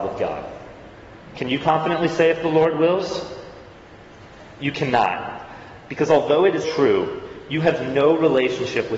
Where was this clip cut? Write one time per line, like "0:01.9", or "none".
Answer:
0:06.6